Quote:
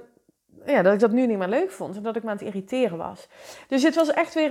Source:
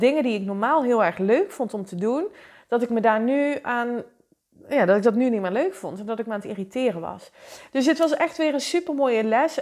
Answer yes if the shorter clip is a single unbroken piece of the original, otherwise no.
yes